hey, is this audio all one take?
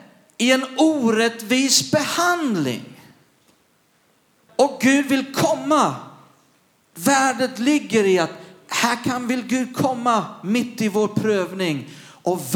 no; 1 cut; at 4.5 s

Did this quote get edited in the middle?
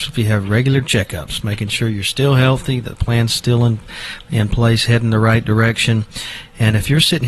no; 0 cuts

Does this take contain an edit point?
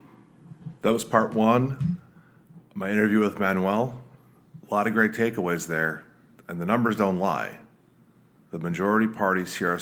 no; 0 cuts

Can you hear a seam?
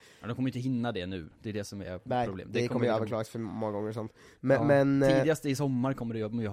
no; 0 cuts

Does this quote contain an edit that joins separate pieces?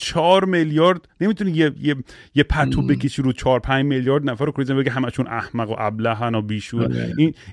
no; 0 cuts

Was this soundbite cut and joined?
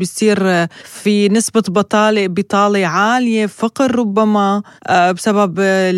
no; 0 cuts

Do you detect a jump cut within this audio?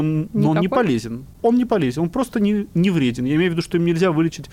no; 0 cuts

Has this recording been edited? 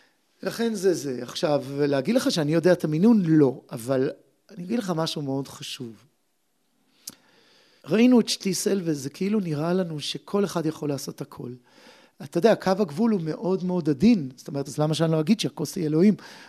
yes; 3 cuts; at 7.8 s, 12.1 s, 14.7 s

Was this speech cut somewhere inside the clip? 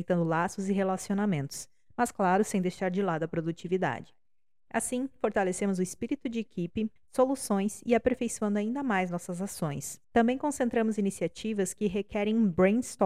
yes; 2 cuts; at 7.0 s, 10.0 s

